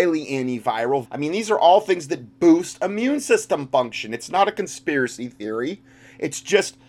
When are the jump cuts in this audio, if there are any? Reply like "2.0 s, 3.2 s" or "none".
1.0 s